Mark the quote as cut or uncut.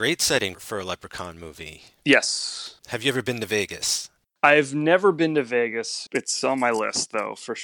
cut